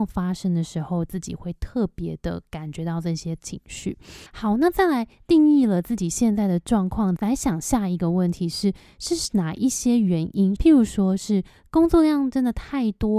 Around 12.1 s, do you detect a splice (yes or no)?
no